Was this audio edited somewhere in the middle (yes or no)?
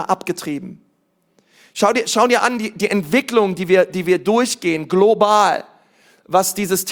no